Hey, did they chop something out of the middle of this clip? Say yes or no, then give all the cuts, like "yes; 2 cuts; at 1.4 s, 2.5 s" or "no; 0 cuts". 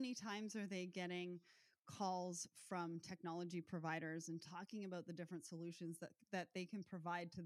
no; 0 cuts